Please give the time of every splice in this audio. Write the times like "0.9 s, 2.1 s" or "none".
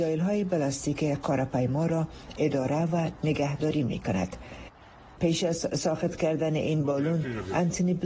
5.2 s